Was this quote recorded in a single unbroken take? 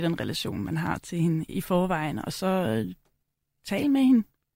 no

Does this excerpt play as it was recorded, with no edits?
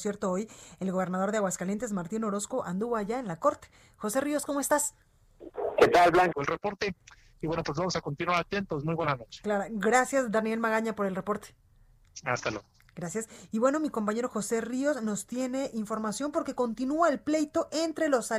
no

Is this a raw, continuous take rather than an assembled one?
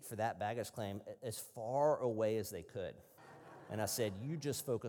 no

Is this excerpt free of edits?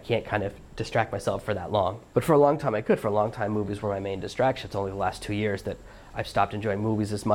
yes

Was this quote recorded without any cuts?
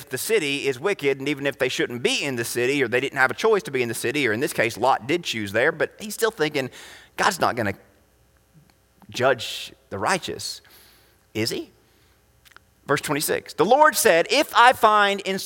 yes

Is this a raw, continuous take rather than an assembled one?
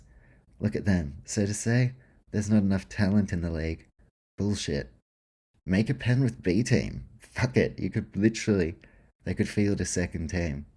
yes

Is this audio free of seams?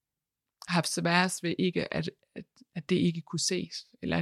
yes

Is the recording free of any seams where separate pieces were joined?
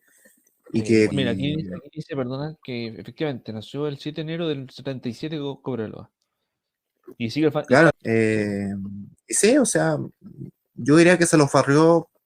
no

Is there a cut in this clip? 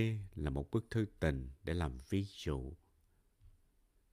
no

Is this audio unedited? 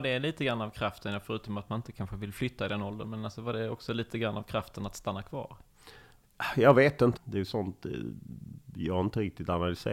no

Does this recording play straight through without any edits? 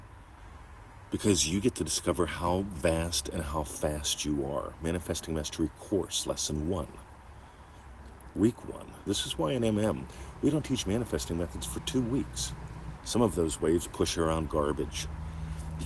no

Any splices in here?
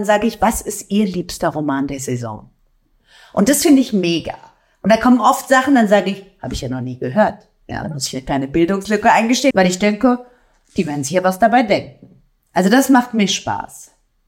yes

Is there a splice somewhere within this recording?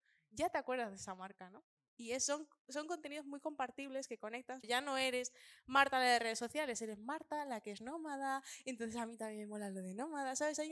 yes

